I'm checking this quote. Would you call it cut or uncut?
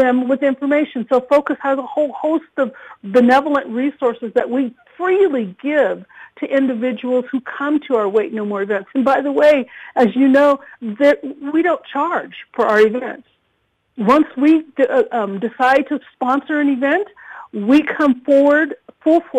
uncut